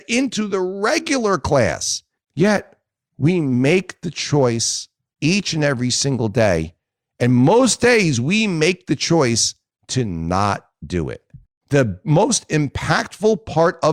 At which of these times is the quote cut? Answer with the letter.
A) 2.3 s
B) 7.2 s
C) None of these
C